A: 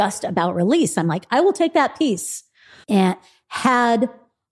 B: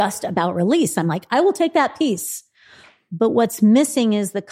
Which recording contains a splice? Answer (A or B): A